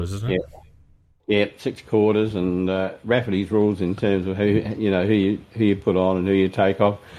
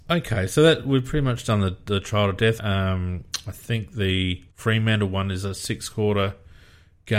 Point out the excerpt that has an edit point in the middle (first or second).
second